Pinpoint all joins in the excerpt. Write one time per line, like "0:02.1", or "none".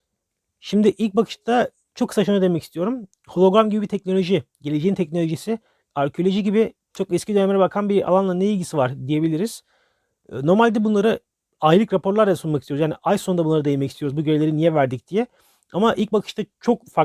none